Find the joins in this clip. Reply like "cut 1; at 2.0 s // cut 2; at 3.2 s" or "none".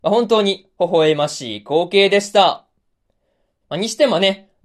cut 1; at 3.6 s